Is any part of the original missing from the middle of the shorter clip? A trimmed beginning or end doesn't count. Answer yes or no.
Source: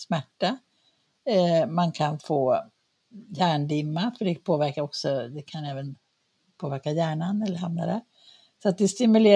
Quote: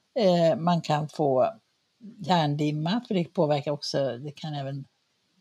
no